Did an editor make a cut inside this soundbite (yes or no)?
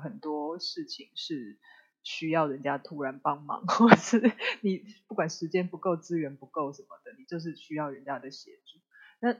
no